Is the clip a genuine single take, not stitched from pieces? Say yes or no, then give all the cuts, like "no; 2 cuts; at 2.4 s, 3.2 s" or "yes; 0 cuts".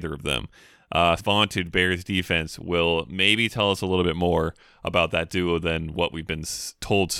no; 1 cut; at 1.2 s